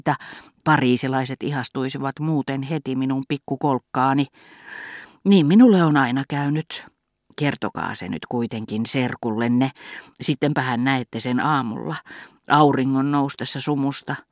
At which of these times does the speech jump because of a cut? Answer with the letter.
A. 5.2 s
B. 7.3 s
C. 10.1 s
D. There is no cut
C